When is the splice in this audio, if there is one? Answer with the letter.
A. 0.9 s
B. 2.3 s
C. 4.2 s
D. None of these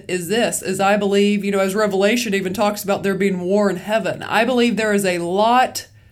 D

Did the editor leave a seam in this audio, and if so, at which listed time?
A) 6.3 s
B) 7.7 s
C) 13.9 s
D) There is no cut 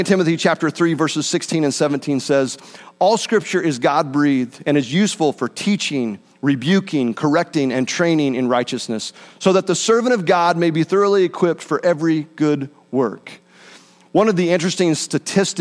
D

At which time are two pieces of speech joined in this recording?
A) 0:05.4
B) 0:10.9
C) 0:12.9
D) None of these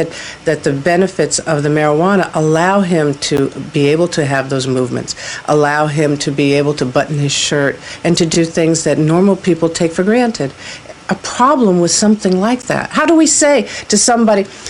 B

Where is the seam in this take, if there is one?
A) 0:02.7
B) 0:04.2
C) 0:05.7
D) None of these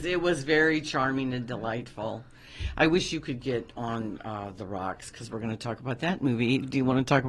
D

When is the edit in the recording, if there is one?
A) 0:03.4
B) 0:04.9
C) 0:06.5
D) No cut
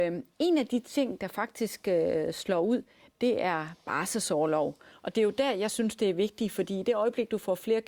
B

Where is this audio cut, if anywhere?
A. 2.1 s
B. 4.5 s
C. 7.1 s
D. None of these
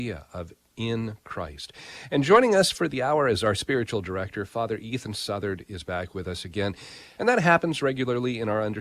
C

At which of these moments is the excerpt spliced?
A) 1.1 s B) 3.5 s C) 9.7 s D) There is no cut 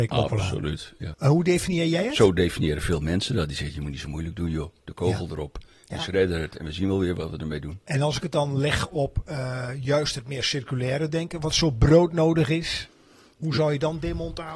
A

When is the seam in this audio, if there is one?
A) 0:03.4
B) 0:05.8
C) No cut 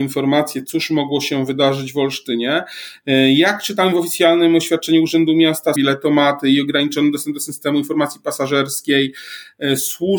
B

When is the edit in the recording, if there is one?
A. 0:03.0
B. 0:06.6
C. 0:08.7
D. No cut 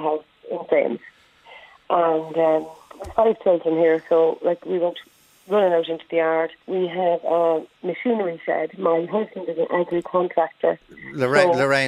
B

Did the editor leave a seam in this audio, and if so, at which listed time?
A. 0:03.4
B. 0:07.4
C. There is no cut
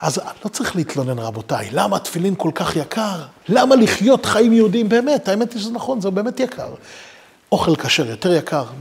A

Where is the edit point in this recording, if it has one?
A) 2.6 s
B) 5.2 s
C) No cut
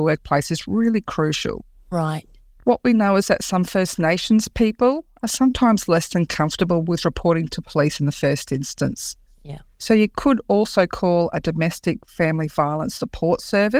B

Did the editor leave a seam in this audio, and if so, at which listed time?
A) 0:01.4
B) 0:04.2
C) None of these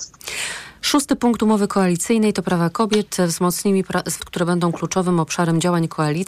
B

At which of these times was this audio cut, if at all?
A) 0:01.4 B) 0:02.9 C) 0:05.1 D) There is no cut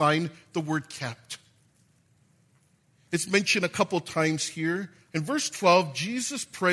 C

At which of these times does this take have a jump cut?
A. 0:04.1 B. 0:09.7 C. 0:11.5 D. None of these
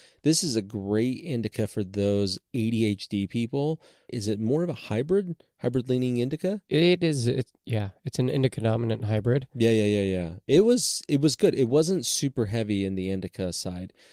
A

